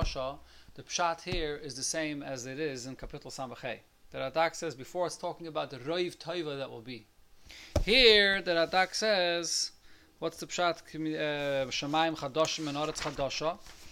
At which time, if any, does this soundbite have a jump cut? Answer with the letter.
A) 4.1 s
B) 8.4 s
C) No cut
A